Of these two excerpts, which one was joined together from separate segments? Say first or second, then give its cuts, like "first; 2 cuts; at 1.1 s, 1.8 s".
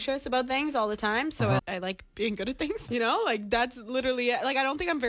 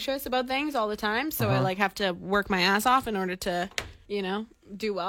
first; 2 cuts; at 1.6 s, 2.9 s